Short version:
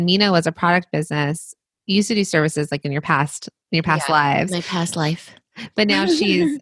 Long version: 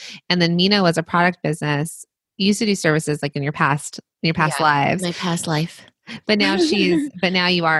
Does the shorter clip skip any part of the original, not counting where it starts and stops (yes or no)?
no